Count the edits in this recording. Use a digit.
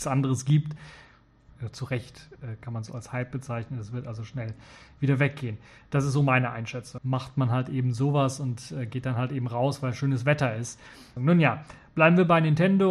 3